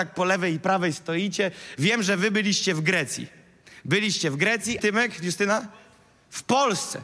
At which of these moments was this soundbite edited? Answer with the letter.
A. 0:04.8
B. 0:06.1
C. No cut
A